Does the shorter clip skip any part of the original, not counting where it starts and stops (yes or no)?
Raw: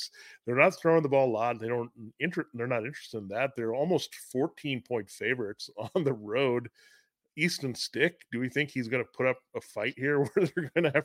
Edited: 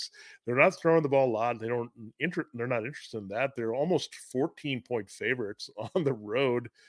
no